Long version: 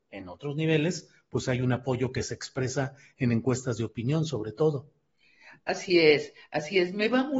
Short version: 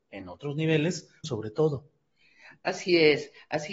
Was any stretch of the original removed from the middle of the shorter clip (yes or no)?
yes